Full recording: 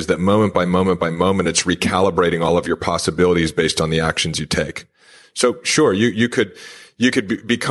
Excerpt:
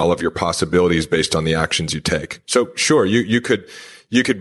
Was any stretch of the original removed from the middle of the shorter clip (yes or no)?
yes